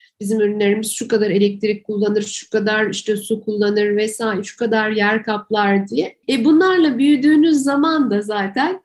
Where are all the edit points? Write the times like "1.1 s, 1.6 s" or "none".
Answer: 6.2 s